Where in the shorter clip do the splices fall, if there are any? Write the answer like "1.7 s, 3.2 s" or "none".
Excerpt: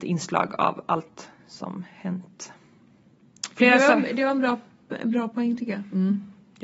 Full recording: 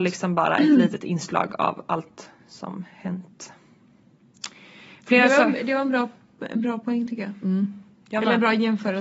3.5 s

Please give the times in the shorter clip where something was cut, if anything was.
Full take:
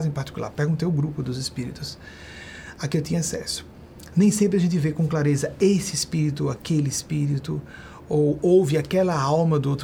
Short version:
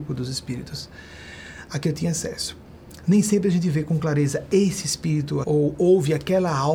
5.4 s

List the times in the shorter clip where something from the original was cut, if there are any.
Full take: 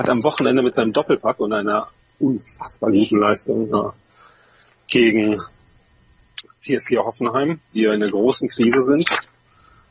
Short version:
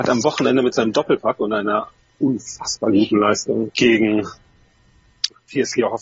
3.7 s

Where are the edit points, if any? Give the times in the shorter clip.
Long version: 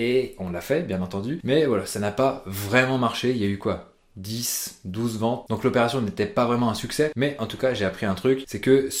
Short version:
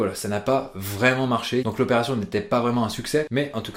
1.6 s

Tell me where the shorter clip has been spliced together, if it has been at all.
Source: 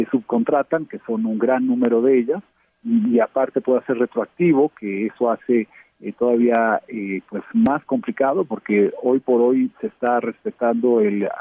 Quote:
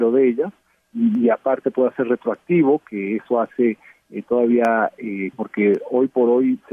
5.3 s

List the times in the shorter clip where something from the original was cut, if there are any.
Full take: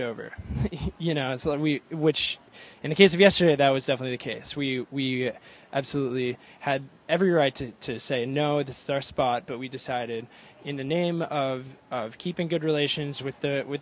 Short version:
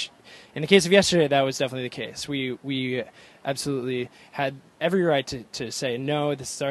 none

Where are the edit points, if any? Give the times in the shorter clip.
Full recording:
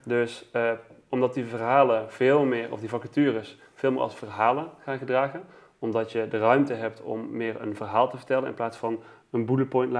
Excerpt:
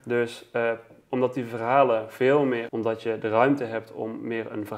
2.7 s

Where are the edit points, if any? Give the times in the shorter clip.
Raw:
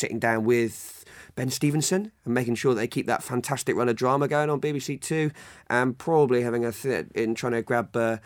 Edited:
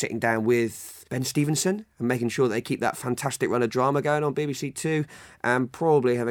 1.0 s

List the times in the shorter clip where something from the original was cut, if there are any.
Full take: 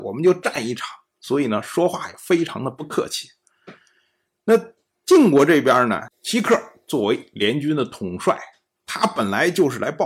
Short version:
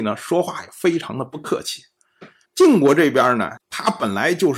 2.4 s, 3.6 s

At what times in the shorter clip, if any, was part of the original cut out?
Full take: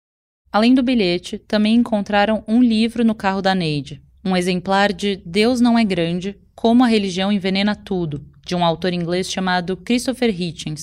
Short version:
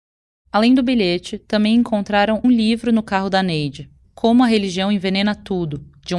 2.4 s, 4.0 s

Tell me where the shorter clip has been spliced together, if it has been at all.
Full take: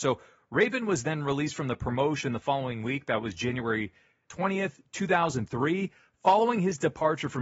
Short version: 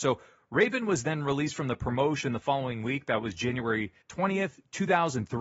4.0 s

